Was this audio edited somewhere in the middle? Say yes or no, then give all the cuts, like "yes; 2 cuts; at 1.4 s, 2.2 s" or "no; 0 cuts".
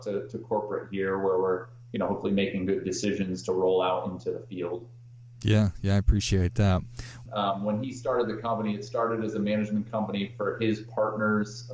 yes; 1 cut; at 7.3 s